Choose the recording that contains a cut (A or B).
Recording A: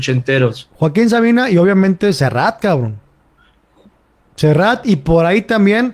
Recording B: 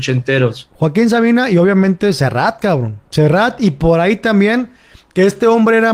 B